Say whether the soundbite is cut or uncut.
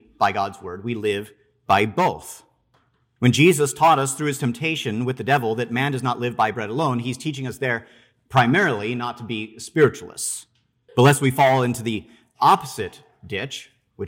cut